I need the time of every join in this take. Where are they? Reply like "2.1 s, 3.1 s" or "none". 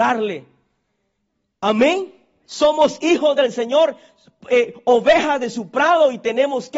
2.5 s